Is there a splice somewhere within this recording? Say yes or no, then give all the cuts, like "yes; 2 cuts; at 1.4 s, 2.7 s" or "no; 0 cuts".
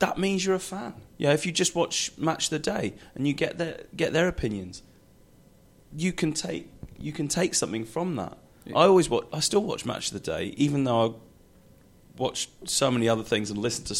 yes; 1 cut; at 1.1 s